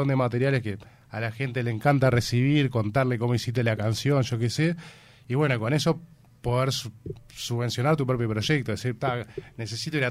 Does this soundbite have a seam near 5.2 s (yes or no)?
no